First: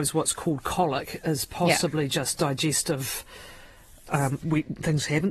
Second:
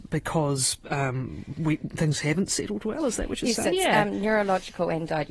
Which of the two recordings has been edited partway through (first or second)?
first